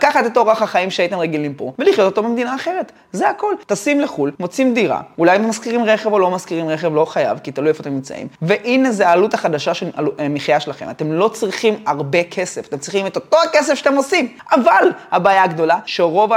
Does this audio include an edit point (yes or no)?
no